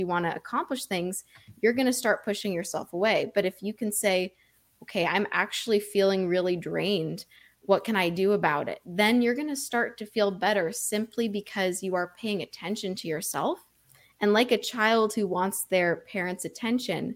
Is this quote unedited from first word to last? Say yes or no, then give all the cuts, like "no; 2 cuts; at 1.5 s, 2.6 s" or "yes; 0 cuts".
yes; 0 cuts